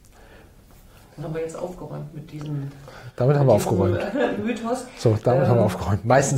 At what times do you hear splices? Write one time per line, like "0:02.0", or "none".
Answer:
none